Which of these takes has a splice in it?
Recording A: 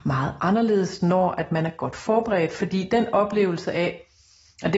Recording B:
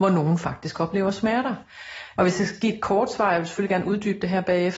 B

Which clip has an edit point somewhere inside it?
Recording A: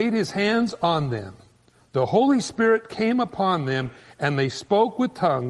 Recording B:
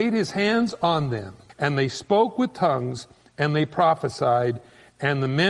B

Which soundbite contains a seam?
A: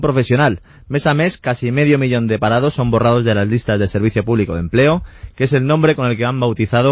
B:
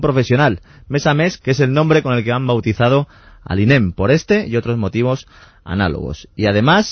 B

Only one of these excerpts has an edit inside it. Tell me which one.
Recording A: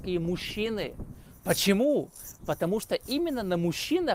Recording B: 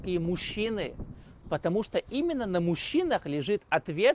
B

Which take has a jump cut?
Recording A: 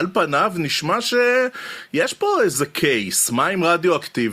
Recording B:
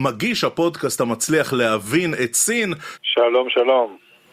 B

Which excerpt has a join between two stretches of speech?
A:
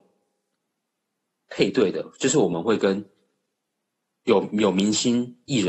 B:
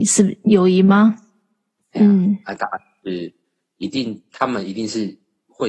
B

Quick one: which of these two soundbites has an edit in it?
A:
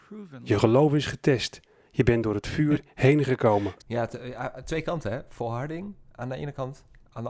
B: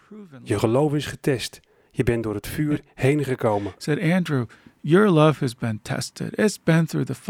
A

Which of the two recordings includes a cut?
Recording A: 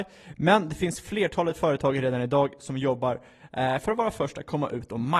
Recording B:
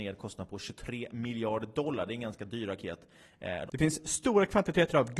B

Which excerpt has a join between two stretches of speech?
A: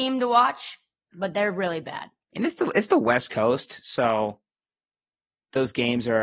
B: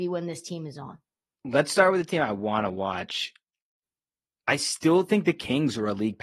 A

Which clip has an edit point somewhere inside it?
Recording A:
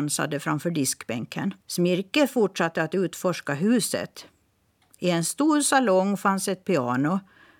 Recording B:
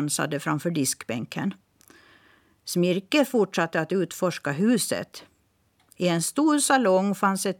A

